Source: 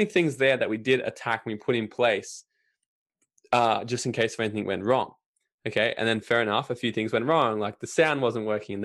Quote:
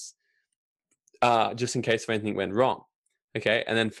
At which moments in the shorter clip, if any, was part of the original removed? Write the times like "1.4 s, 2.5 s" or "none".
none